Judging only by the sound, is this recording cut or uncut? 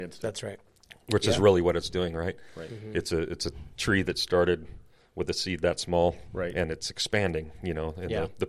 uncut